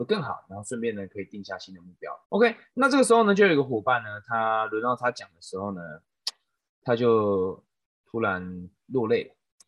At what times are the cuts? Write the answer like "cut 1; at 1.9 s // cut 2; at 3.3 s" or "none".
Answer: cut 1; at 2.2 s